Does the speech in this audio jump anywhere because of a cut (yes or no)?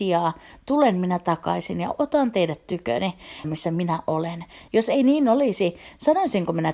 yes